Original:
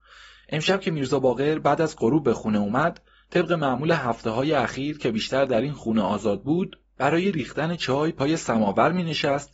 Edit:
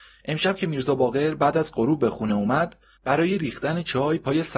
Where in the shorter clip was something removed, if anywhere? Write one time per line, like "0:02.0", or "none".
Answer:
0:03.0